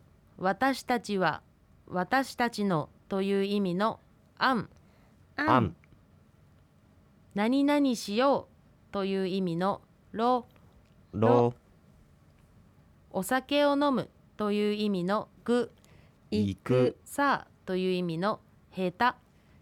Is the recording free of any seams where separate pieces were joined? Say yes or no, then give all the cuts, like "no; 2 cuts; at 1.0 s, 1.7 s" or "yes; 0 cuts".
no; 2 cuts; at 15.4 s, 17.0 s